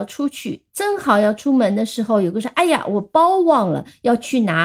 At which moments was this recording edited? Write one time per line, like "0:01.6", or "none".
none